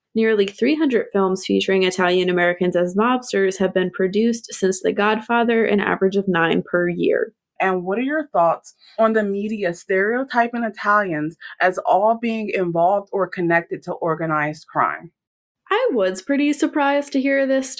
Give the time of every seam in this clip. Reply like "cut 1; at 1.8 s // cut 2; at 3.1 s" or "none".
cut 1; at 7.6 s